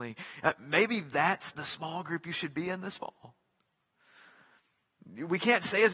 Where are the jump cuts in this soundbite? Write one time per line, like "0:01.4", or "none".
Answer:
0:01.5